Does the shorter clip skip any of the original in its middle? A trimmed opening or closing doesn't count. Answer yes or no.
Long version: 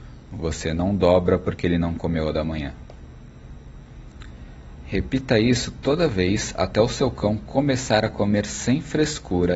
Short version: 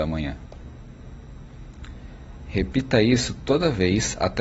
no